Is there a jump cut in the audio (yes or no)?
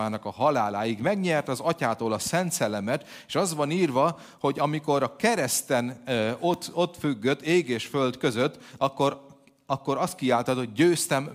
no